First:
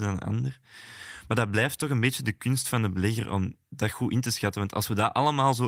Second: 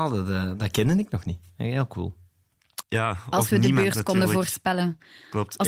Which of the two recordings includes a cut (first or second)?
second